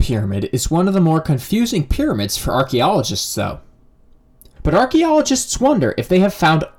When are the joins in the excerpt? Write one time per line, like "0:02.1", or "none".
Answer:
0:04.6